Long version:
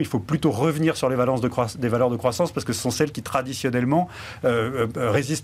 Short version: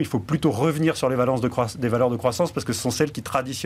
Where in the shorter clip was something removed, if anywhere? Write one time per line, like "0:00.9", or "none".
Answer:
none